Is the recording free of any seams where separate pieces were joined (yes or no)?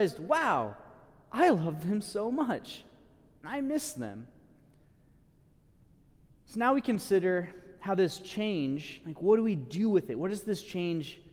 yes